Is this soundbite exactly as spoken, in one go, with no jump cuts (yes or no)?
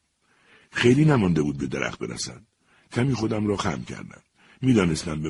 yes